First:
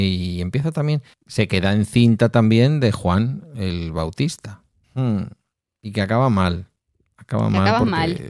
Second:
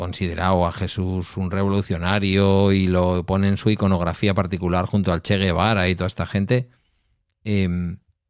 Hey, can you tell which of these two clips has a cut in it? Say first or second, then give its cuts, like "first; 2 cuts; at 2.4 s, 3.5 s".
first; 2 cuts; at 1.1 s, 4.8 s